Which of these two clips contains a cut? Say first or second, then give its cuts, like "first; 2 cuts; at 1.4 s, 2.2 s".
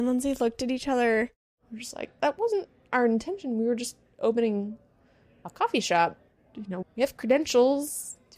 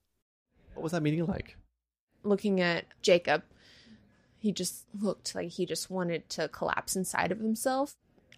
first; 2 cuts; at 2.2 s, 6.8 s